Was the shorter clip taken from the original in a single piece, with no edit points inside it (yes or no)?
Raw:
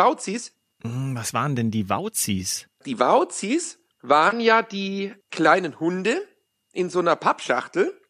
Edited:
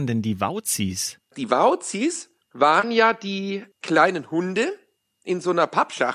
yes